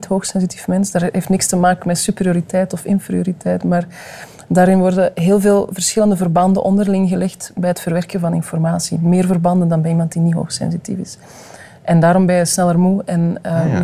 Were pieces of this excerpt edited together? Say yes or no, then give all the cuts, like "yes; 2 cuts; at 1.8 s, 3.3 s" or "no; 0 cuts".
no; 0 cuts